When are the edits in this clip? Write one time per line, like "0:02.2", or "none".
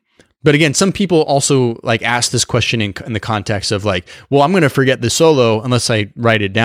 none